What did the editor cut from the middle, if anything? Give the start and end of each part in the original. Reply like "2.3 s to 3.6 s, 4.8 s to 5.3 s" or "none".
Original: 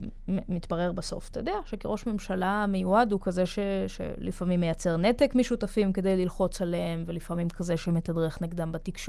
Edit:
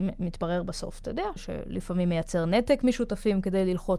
1.7 s to 3.9 s